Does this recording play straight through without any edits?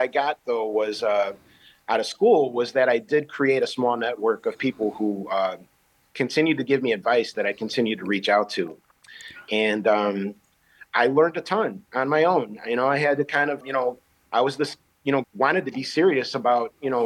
no; 2 cuts; at 13.6 s, 15.2 s

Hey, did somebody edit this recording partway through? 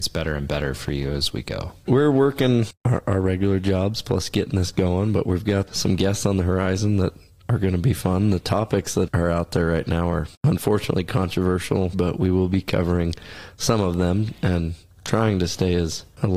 yes; 3 cuts; at 5.7 s, 9.1 s, 11.9 s

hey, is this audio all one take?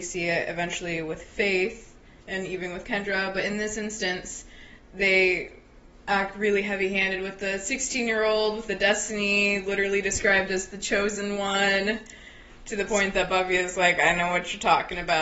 yes; 0 cuts

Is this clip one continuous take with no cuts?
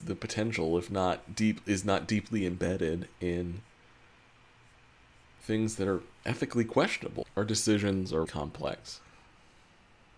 no; 2 cuts; at 7.2 s, 8.2 s

